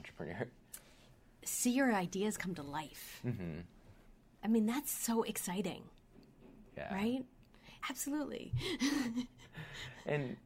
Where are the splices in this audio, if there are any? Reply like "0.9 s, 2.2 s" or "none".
7.8 s